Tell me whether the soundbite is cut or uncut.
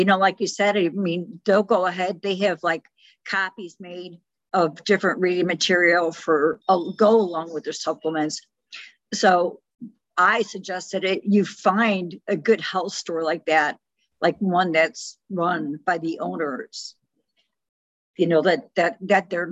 cut